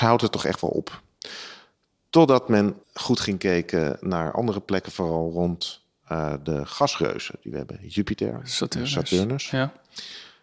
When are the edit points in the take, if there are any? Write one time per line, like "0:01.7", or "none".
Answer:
0:02.8